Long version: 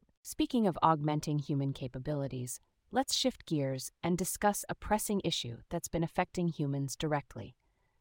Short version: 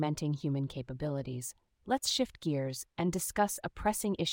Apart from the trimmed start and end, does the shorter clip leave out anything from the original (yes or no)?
no